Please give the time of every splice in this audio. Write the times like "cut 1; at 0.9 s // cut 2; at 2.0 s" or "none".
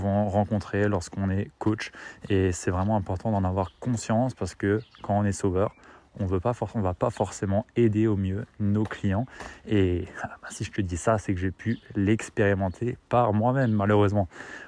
none